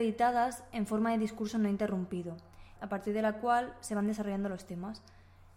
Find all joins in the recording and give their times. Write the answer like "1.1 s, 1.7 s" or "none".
2.8 s